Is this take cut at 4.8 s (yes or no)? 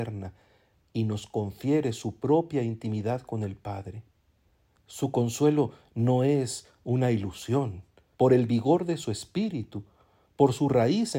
yes